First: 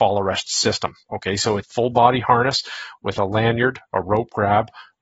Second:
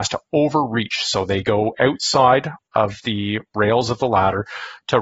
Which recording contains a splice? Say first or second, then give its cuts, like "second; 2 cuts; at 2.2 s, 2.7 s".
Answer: first; 1 cut; at 1.6 s